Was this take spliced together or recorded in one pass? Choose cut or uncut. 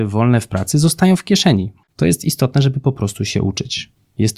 cut